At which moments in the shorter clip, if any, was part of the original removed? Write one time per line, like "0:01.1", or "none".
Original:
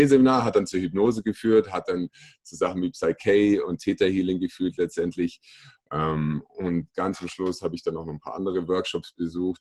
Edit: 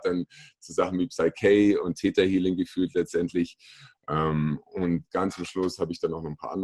none